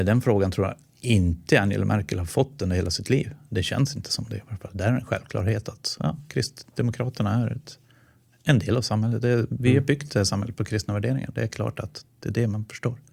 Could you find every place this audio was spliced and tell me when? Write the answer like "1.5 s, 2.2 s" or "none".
none